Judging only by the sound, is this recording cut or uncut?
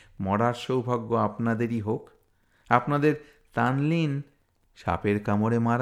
uncut